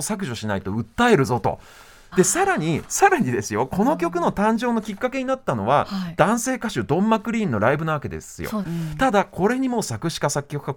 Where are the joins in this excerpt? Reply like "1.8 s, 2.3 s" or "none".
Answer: 2.1 s, 8.6 s